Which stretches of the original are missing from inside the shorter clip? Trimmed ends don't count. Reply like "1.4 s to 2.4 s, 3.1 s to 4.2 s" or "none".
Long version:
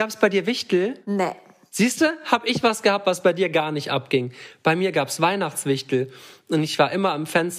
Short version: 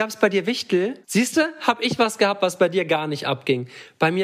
1.0 s to 1.7 s